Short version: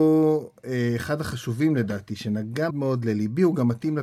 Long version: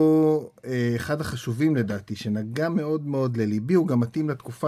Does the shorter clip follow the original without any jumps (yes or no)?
no